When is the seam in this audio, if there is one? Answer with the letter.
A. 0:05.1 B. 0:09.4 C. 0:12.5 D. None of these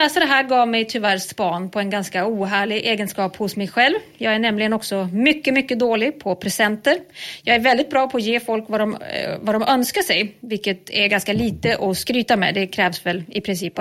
D